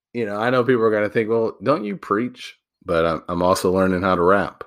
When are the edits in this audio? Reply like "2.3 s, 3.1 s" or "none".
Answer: 2.7 s